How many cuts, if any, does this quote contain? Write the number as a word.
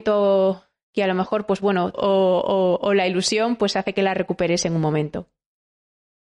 one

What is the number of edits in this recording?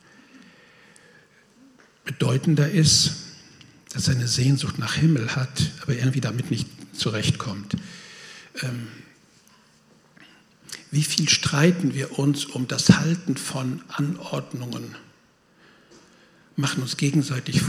zero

